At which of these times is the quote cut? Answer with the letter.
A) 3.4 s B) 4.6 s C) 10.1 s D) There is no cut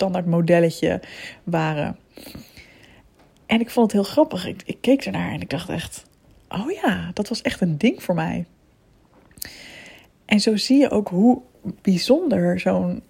D